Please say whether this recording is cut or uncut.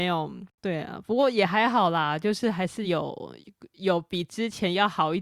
uncut